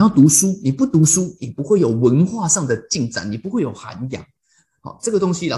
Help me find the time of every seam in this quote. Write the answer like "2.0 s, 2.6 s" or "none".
none